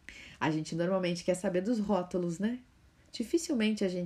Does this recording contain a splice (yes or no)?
no